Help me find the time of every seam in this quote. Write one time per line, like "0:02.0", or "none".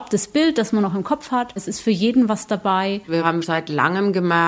0:01.6
0:03.4

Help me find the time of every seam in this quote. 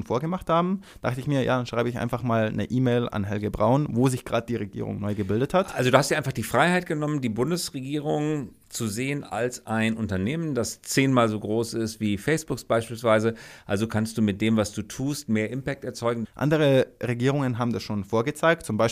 0:16.2

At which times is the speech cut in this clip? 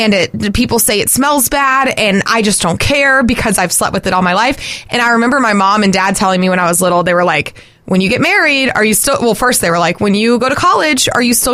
none

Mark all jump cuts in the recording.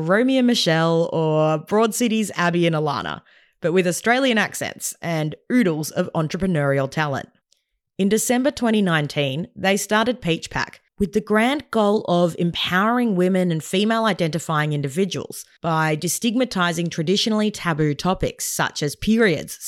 none

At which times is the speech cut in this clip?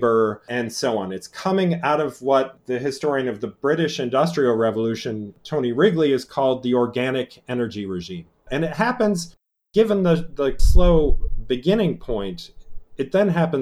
0:08.5

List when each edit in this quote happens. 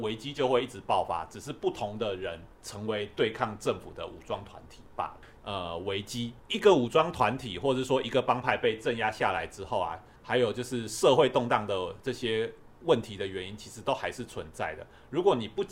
0:05.4
0:10.2

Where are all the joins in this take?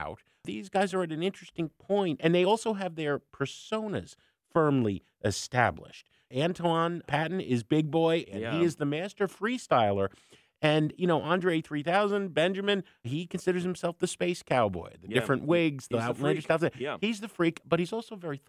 0:08.2

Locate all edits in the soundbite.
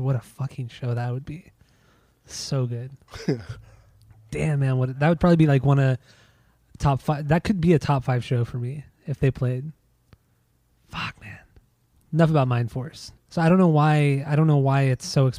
0:11.9
0:13.1

